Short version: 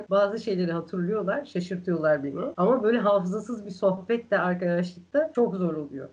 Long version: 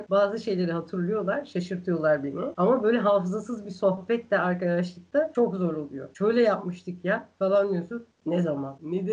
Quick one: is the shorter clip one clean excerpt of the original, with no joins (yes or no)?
yes